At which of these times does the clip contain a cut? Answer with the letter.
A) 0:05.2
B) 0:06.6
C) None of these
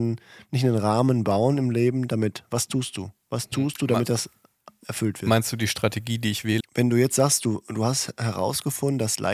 B